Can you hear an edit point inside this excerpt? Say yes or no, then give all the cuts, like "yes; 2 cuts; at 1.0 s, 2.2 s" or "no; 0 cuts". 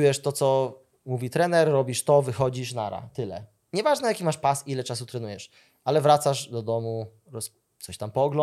no; 0 cuts